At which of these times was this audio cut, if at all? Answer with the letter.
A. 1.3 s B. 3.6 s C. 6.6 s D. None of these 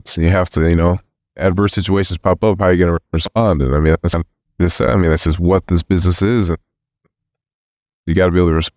D